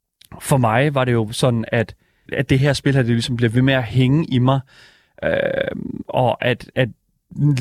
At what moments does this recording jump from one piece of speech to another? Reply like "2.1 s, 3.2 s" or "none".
2.3 s